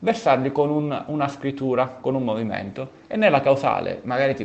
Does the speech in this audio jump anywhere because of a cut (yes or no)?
no